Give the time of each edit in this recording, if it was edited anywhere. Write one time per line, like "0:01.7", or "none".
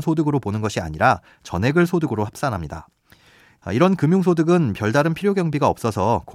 0:03.6

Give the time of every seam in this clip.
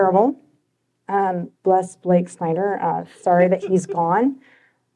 0:01.5

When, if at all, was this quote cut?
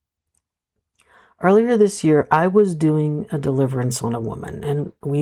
none

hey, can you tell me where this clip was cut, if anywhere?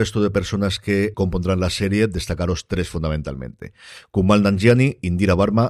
0:01.1

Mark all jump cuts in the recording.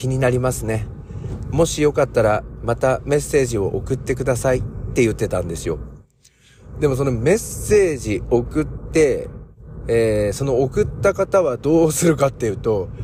none

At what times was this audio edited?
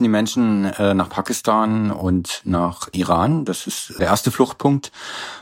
0:04.0

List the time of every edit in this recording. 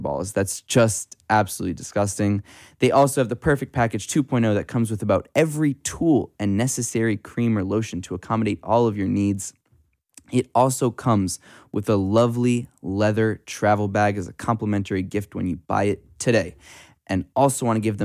none

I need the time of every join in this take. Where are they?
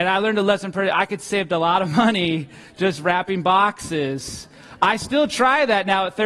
none

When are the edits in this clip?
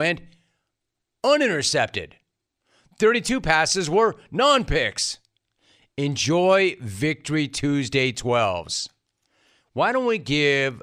none

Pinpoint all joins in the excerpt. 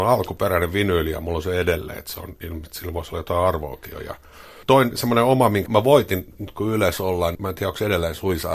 0:05.7
0:07.3

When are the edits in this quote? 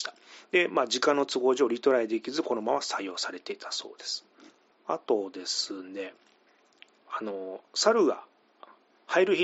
none

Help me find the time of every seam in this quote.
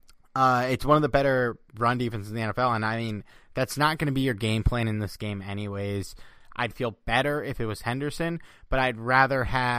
0:06.4

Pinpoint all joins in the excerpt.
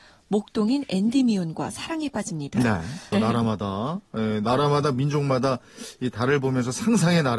0:03.1

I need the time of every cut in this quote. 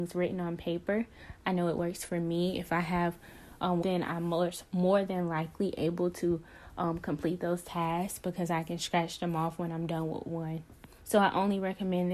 0:03.8
0:11.0

